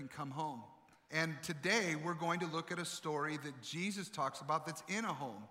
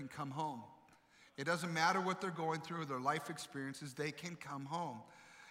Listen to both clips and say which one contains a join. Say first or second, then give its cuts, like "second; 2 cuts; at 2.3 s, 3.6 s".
first; 1 cut; at 1.1 s